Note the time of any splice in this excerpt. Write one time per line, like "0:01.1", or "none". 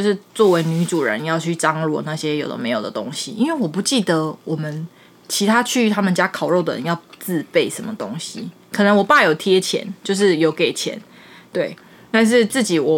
none